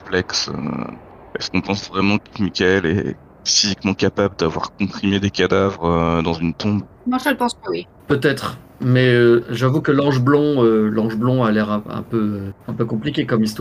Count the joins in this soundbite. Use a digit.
0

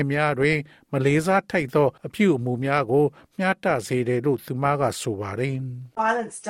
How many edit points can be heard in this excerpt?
1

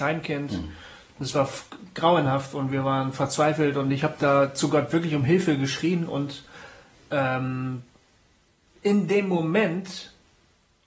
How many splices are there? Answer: 0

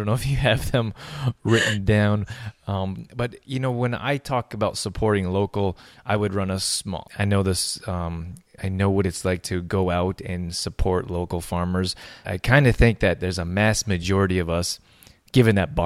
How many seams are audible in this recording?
2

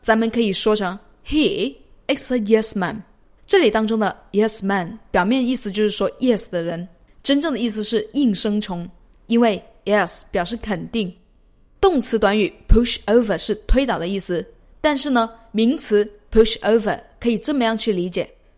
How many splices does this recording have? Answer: 0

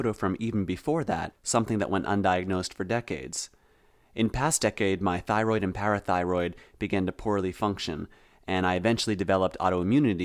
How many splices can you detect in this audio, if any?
1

